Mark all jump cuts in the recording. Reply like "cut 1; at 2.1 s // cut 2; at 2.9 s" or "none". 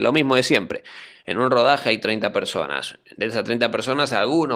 none